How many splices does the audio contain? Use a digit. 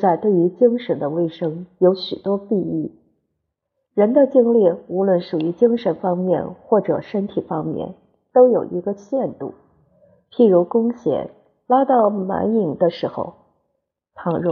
0